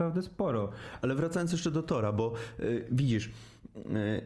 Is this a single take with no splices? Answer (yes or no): yes